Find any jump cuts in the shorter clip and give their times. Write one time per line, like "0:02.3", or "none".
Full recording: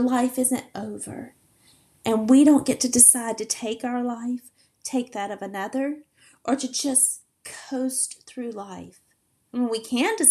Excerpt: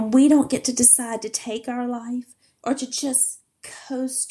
0:02.6